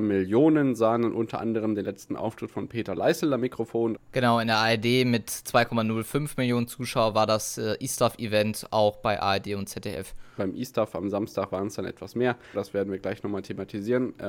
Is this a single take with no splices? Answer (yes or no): no